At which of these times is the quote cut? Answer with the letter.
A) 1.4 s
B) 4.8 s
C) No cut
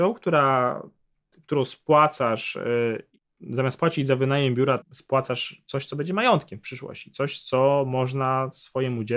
B